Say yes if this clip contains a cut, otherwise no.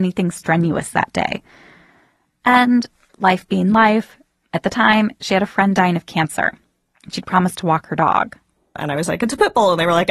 no